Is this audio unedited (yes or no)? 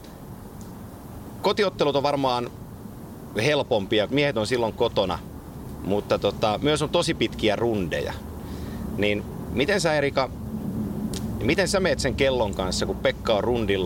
no